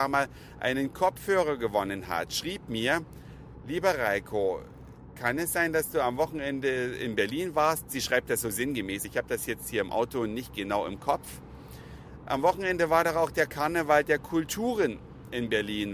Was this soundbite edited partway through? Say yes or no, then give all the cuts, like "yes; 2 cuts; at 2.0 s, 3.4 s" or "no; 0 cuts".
no; 0 cuts